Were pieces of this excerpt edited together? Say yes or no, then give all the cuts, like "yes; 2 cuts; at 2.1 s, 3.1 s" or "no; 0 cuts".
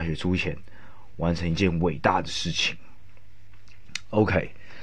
no; 0 cuts